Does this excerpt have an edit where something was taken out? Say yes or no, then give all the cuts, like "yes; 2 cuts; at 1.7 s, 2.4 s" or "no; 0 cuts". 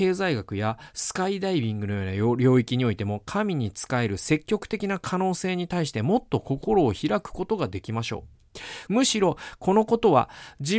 yes; 1 cut; at 8.9 s